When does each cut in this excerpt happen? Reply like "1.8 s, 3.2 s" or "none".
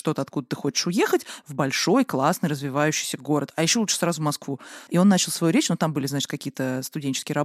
4.9 s